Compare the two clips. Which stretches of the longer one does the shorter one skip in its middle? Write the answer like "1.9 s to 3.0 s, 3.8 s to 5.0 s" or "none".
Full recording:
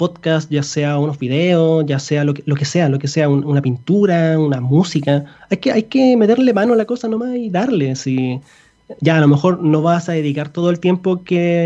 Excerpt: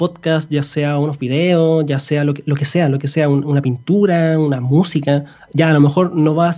5.5 s to 8.9 s